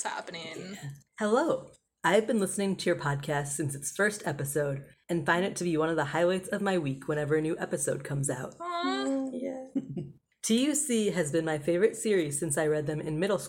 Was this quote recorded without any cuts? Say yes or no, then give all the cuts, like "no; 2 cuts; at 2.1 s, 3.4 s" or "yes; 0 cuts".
no; 1 cut; at 1.1 s